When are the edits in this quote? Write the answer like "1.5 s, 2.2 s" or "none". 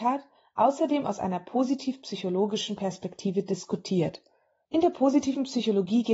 4.6 s